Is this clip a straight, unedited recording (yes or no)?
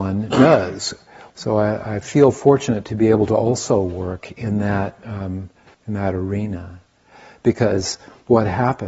no